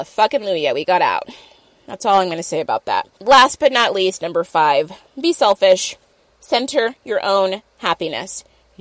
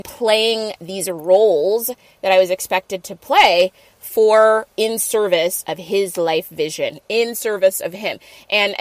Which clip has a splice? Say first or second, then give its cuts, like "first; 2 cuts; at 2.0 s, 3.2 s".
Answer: second; 1 cut; at 7.0 s